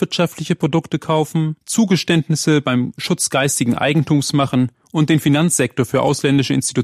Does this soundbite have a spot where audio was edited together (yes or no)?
yes